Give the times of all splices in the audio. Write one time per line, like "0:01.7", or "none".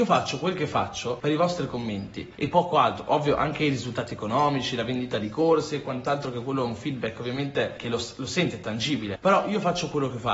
none